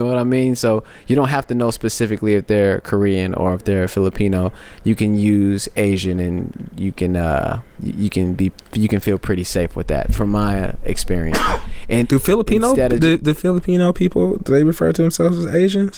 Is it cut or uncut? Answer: cut